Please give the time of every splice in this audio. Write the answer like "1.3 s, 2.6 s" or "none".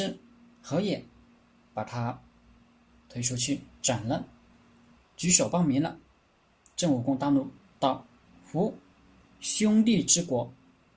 5.0 s